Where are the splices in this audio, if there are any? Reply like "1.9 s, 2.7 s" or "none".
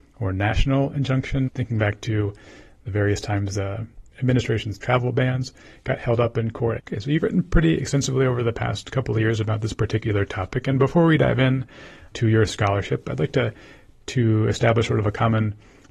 1.5 s, 6.8 s